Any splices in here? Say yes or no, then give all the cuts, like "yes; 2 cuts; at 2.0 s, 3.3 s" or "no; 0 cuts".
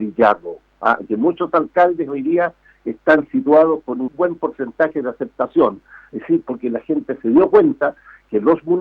yes; 1 cut; at 4.1 s